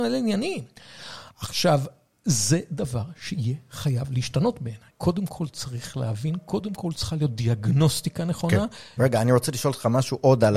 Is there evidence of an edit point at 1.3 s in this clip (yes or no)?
no